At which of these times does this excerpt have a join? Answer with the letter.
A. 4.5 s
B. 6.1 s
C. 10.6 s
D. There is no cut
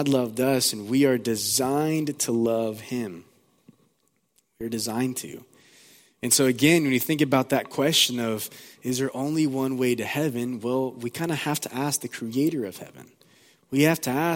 D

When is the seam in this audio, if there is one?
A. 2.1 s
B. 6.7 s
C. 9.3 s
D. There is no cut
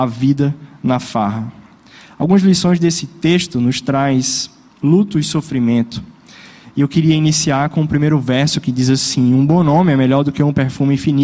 D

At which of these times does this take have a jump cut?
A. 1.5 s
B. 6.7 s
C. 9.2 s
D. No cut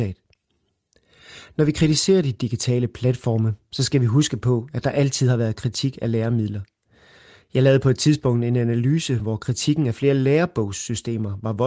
D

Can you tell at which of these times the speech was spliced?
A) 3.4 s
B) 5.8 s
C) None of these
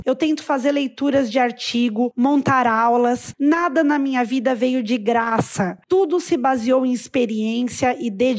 C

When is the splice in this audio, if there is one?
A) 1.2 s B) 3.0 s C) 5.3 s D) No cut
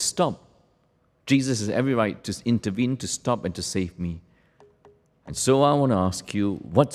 D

